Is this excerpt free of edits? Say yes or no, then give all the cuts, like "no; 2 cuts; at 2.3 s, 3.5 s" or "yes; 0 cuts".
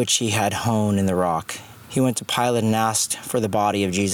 no; 1 cut; at 1.8 s